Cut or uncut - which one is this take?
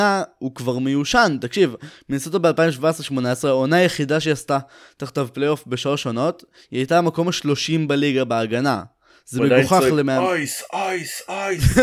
cut